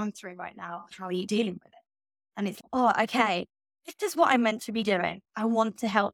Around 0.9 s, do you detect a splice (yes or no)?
yes